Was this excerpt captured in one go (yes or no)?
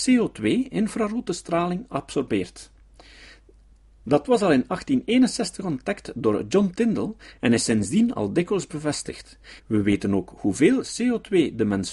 no